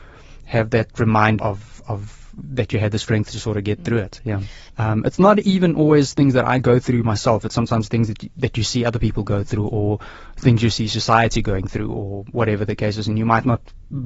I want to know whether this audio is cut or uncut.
cut